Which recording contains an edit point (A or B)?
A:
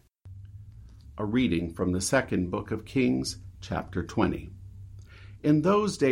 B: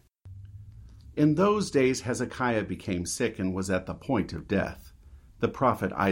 B